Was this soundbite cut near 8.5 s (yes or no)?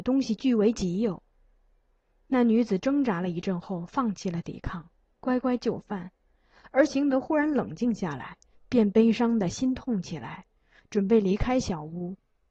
yes